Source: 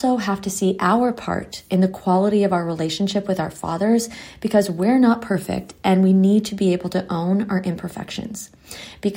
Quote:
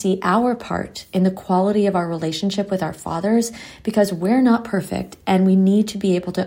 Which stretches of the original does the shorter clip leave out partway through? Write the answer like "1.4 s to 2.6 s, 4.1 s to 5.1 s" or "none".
none